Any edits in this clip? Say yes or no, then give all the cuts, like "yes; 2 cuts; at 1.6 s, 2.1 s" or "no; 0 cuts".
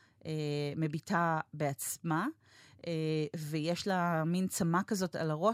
no; 0 cuts